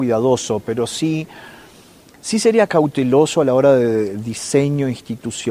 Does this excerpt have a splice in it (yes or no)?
no